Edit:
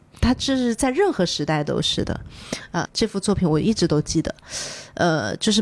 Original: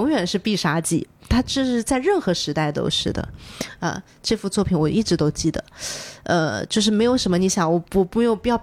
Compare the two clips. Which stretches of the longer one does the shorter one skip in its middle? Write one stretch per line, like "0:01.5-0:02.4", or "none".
0:03.9-0:04.1